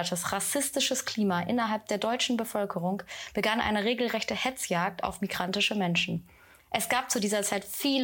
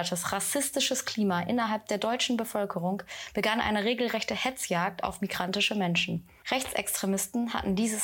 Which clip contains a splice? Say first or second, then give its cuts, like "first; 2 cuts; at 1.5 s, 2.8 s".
second; 1 cut; at 6.4 s